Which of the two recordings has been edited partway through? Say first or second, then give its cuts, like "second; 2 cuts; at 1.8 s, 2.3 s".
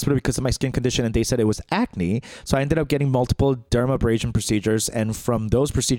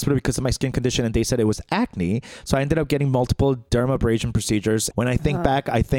second; 1 cut; at 4.9 s